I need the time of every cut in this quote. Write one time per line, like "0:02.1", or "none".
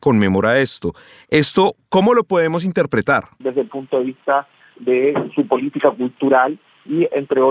0:03.4